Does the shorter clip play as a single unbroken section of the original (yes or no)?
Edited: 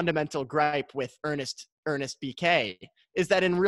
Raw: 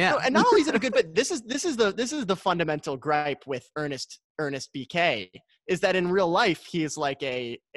yes